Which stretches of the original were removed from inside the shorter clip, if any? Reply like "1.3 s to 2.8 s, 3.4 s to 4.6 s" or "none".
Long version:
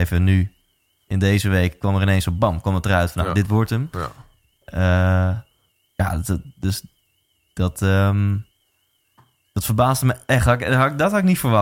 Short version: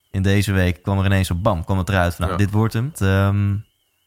3.9 s to 7.7 s